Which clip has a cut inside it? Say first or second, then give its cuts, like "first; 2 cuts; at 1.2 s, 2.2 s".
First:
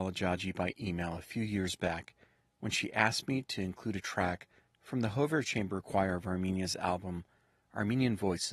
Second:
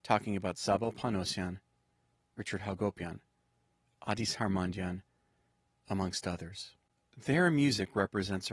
second; 1 cut; at 5.7 s